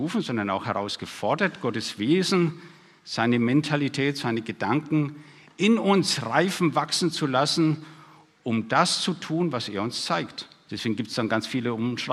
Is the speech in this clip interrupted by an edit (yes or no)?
yes